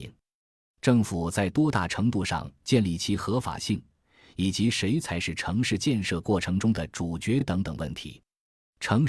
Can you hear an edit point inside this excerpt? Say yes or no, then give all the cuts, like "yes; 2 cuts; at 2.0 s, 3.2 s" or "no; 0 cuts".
no; 0 cuts